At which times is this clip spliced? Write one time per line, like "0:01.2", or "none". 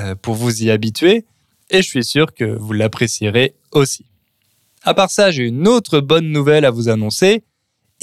none